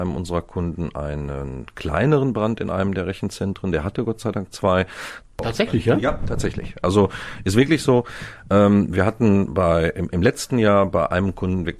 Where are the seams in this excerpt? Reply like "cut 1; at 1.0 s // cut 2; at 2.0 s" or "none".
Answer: cut 1; at 5.2 s